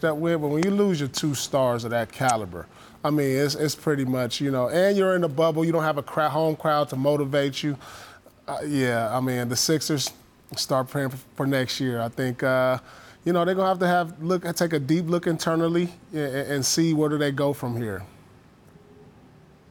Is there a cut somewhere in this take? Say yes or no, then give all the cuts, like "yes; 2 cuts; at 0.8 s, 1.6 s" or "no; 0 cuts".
no; 0 cuts